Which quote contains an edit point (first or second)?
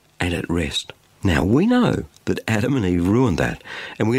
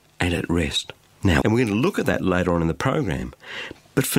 second